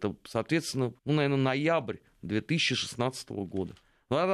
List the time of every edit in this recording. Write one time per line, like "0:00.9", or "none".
0:01.0